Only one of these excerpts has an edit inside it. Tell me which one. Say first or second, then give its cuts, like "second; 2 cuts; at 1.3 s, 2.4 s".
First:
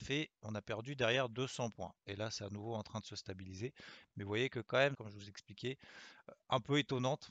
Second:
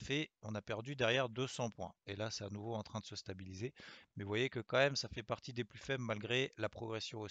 first; 1 cut; at 4.9 s